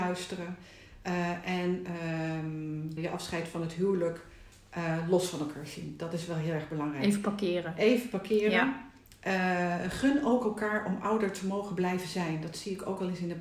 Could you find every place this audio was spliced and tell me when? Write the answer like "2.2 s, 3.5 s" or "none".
3.0 s